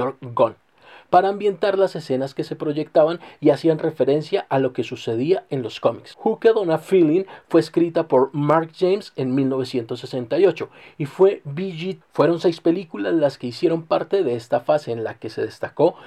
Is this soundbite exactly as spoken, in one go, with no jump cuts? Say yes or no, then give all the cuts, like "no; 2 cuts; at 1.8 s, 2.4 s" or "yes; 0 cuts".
no; 1 cut; at 12.0 s